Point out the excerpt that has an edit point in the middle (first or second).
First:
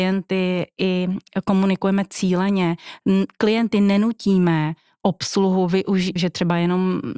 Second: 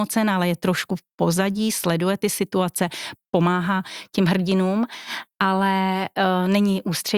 first